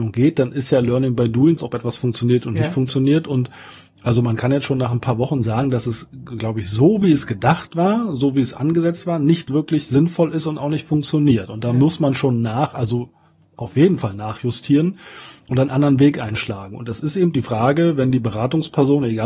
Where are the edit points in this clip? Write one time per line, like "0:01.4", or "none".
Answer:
0:01.6